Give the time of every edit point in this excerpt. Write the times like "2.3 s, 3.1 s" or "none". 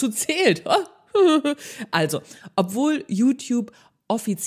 none